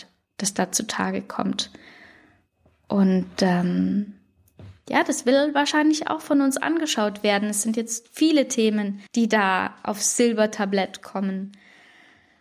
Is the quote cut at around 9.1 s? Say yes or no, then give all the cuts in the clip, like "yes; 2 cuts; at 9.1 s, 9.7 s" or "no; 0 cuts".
yes; 1 cut; at 9.1 s